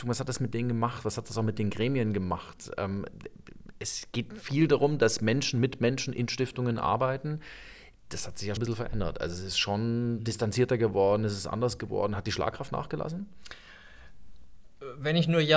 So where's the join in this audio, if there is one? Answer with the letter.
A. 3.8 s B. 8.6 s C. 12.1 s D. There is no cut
B